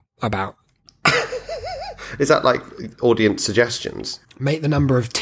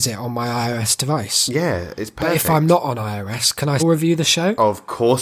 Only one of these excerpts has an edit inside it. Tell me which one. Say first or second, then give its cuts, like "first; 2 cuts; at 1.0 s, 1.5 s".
second; 1 cut; at 3.8 s